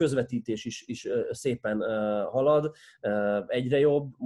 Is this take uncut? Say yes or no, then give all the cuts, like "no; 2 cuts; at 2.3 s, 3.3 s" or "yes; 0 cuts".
yes; 0 cuts